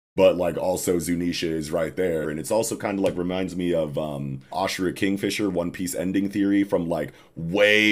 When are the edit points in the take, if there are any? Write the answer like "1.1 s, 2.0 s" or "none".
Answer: 2.2 s, 4.5 s

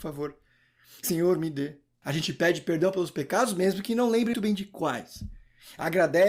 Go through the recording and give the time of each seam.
2.0 s, 4.3 s

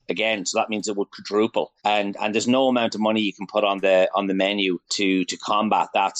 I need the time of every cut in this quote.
1.8 s, 4.9 s

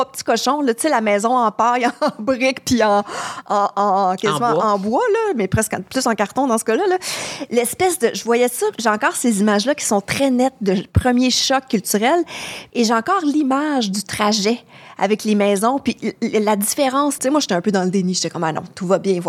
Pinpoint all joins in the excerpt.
12.7 s, 17.2 s

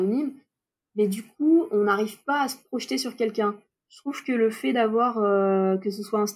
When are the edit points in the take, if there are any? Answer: none

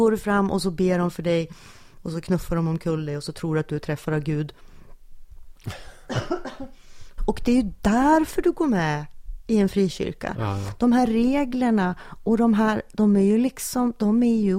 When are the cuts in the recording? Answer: 7.2 s

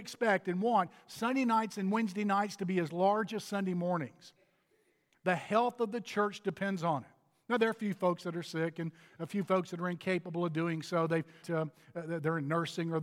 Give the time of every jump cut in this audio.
11.4 s

